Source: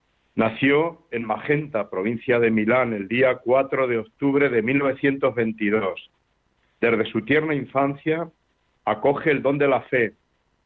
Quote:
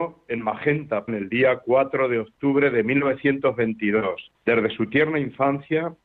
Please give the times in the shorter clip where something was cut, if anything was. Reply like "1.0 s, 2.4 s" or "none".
1.1 s, 4.4 s